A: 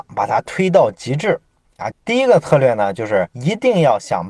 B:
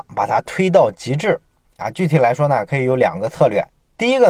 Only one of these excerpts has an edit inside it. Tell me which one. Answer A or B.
A